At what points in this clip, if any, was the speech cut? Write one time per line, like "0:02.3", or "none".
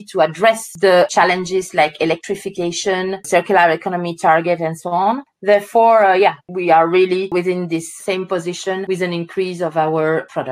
none